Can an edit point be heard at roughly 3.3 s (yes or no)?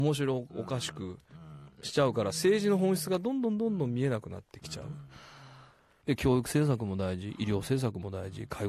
no